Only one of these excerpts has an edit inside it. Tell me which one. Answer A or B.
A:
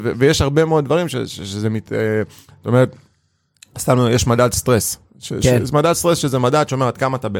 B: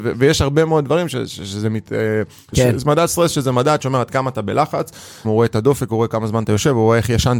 B